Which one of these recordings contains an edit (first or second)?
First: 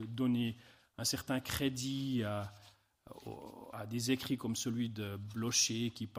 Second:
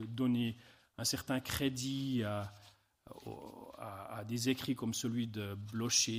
first